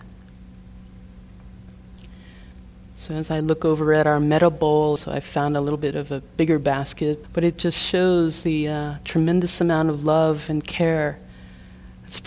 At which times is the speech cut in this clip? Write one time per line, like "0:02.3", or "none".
0:05.0
0:07.2
0:08.4